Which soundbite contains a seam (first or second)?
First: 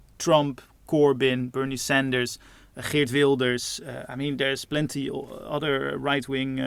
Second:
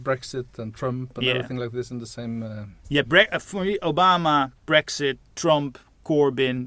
second